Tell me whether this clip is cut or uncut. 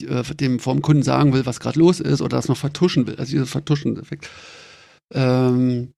uncut